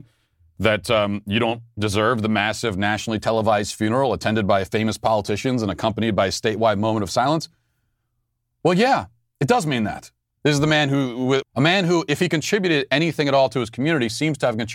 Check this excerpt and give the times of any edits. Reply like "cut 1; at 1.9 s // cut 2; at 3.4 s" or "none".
cut 1; at 10.4 s // cut 2; at 11.4 s